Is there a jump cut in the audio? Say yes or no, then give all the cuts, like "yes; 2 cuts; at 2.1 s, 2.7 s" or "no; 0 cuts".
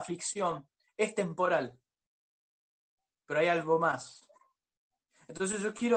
no; 0 cuts